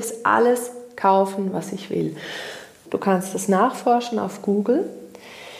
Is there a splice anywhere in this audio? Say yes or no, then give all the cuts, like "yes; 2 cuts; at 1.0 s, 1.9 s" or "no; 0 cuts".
yes; 1 cut; at 2.9 s